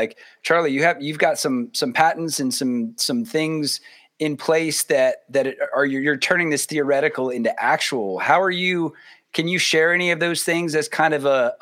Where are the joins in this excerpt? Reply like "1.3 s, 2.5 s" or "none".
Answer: none